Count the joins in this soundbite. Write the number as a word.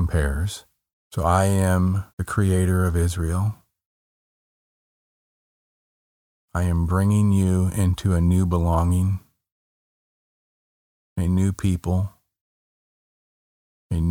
two